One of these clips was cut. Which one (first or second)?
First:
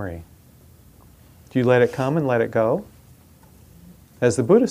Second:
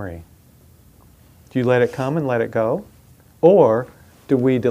second